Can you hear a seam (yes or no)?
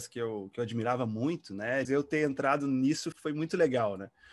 yes